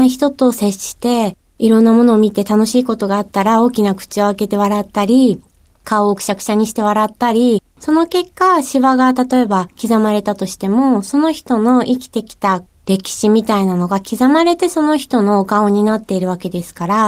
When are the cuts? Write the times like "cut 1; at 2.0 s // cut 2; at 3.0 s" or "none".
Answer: none